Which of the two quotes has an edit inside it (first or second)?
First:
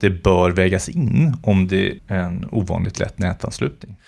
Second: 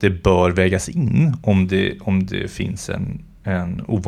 first